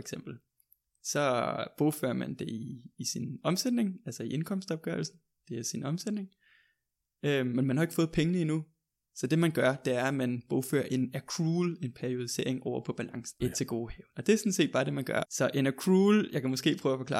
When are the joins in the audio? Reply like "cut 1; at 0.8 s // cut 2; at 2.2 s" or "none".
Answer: cut 1; at 13.4 s // cut 2; at 15.2 s